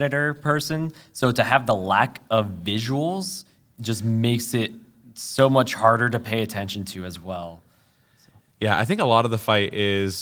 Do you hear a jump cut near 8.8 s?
no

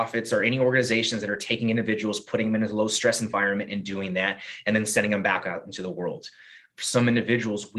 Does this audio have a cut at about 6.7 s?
yes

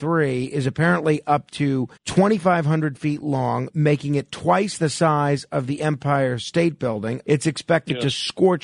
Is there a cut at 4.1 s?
no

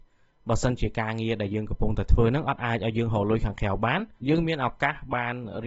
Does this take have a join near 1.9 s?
no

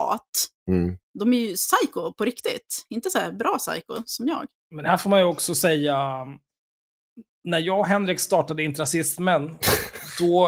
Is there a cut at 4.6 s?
no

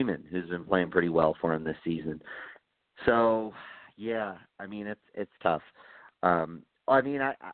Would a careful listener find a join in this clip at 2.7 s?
no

